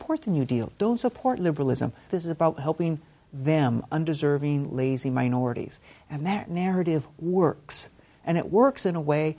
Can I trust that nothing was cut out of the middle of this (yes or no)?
no